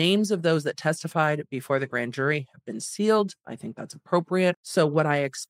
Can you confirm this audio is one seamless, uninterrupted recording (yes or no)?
no